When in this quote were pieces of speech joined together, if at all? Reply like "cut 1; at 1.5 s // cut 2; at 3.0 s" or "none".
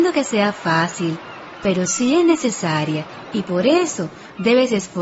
none